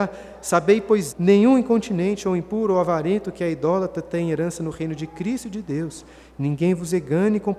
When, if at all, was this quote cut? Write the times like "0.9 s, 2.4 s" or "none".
1.1 s